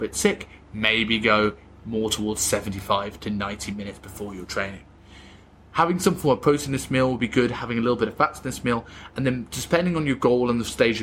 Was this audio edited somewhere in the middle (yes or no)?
no